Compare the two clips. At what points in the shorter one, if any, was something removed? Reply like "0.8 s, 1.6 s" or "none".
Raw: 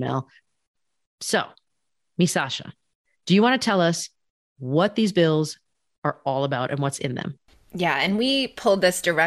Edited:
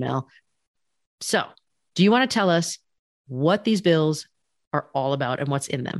1.9 s